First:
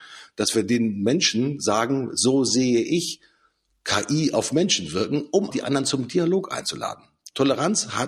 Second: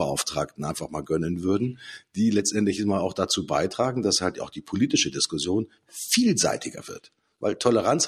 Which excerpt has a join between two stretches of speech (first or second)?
first